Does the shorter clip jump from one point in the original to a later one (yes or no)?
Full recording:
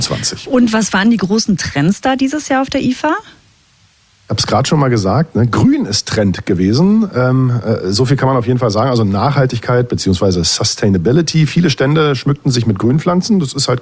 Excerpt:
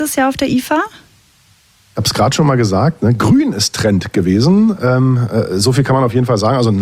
no